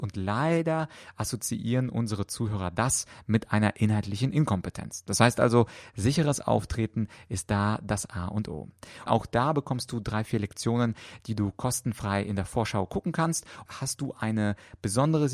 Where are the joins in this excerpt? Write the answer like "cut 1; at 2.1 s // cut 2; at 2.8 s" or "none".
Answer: cut 1; at 9.1 s // cut 2; at 13.7 s